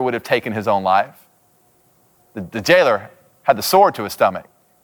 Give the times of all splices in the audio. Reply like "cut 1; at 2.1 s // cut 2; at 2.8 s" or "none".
cut 1; at 2.3 s